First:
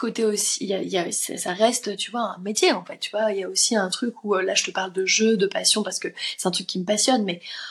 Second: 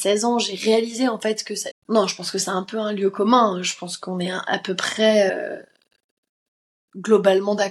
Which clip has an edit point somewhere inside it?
second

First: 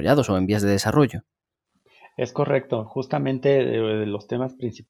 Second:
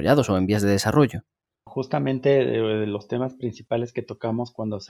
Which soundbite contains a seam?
second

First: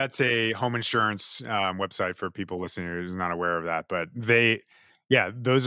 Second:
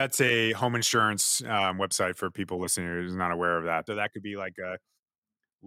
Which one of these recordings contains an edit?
second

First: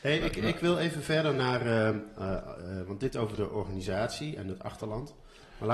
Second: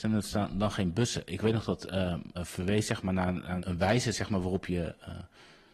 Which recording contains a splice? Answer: second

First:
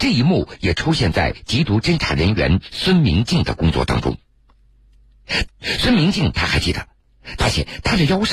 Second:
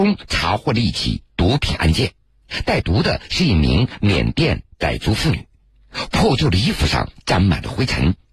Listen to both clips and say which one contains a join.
first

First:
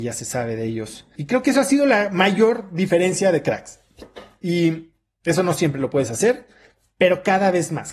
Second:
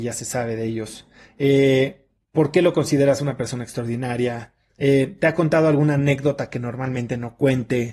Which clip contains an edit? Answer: first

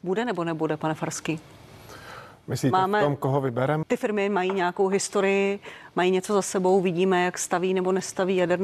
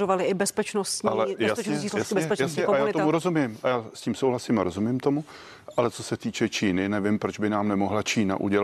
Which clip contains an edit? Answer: first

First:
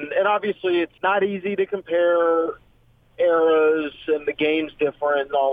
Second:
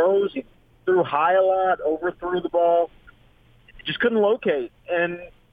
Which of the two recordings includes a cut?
first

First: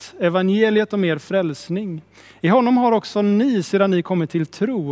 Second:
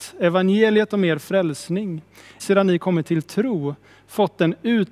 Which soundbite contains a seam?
second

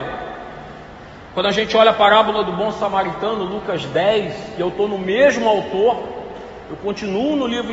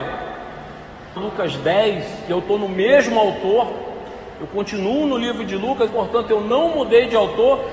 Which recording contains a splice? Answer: second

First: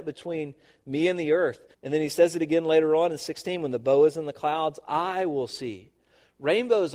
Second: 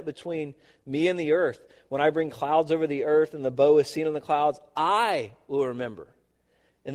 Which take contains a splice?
first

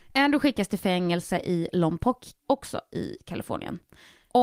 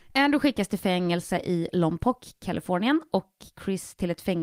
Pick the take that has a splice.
first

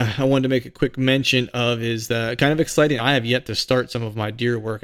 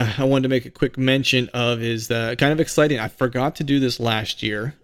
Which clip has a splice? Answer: first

